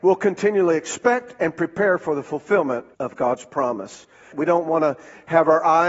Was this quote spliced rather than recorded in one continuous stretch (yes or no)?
yes